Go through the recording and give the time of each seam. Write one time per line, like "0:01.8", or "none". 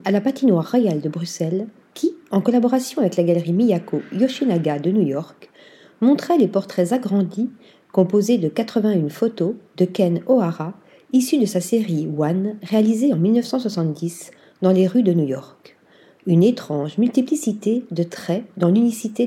none